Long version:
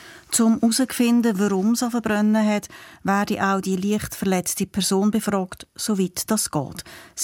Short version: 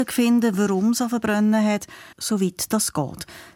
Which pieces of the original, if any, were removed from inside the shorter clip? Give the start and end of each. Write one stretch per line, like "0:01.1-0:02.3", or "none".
0:02.9-0:05.7